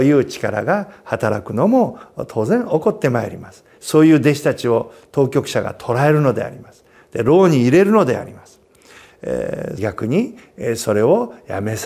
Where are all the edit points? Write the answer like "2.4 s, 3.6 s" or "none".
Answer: 3.8 s, 9.8 s

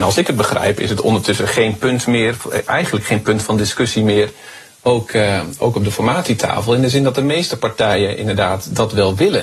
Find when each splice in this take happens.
none

